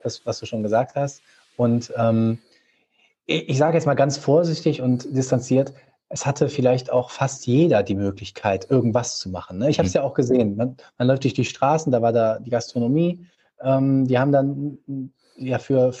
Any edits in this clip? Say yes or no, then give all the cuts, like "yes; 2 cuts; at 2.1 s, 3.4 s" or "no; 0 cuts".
no; 0 cuts